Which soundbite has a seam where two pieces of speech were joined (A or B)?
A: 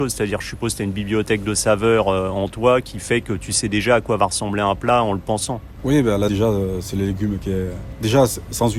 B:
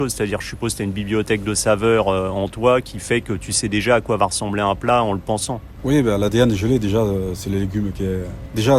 A